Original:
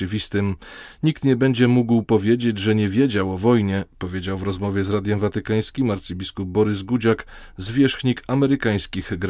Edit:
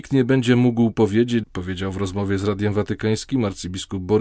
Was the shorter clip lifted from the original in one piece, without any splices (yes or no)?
no